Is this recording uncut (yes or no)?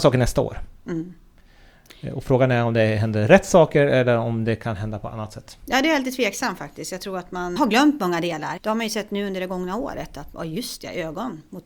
no